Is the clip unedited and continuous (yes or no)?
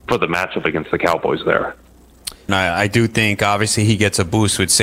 no